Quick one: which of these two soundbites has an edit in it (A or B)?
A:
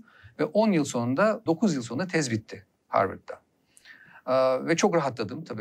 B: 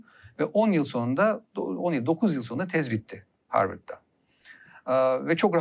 A